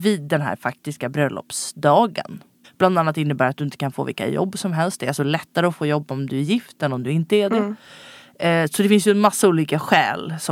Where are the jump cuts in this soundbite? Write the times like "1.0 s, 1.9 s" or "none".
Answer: 2.6 s